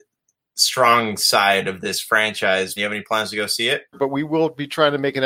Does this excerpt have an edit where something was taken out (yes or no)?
yes